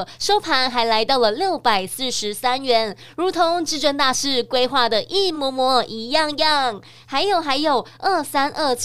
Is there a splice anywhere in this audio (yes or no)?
no